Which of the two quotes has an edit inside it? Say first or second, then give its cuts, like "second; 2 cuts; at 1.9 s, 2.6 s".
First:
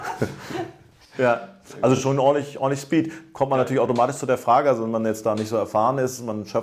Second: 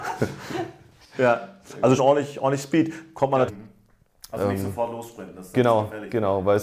second; 2 cuts; at 2.0 s, 3.5 s